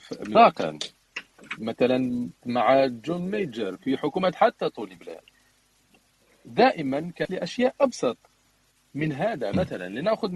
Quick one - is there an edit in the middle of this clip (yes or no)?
yes